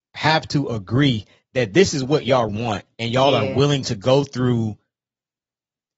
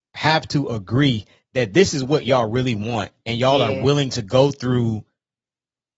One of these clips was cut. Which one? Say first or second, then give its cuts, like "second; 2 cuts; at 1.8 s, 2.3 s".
first; 1 cut; at 2.5 s